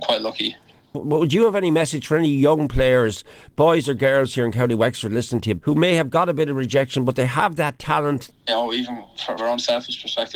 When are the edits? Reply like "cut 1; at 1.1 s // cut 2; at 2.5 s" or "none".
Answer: cut 1; at 5.6 s // cut 2; at 8.3 s // cut 3; at 9.4 s

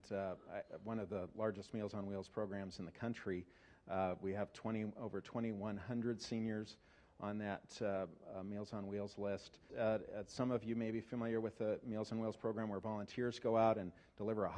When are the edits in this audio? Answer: cut 1; at 9.7 s

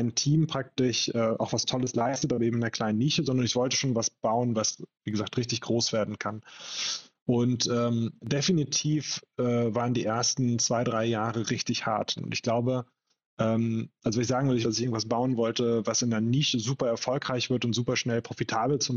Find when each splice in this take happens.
cut 1; at 12.2 s // cut 2; at 14.6 s

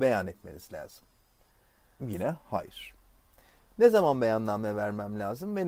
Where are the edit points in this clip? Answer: cut 1; at 2.0 s

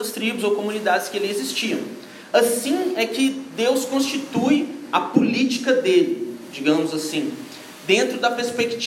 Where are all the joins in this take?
none

